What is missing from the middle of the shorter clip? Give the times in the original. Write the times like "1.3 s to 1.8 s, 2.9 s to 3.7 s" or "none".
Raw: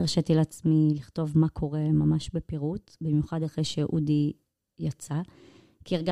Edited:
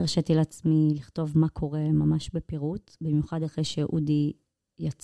none